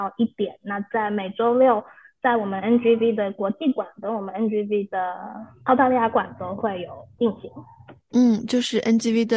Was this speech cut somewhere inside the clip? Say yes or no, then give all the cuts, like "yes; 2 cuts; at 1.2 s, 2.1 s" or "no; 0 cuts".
no; 0 cuts